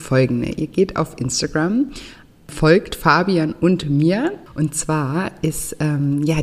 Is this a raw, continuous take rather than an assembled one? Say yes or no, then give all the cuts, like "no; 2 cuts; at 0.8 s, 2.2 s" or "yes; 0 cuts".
no; 1 cut; at 4.5 s